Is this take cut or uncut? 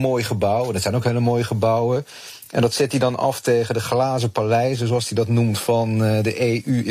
uncut